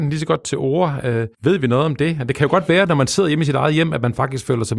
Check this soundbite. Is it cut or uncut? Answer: cut